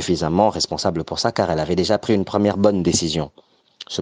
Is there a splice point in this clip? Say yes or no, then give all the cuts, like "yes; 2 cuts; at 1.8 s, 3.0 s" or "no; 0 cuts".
no; 0 cuts